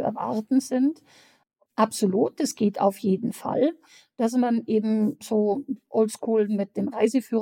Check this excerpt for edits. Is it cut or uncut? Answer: cut